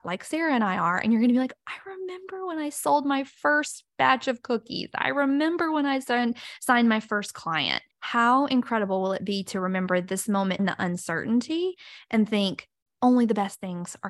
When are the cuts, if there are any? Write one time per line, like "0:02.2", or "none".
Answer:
0:07.9
0:10.6